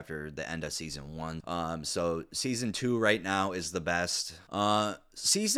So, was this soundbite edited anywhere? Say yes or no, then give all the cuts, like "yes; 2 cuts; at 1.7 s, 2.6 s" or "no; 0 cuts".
yes; 2 cuts; at 1.4 s, 4.5 s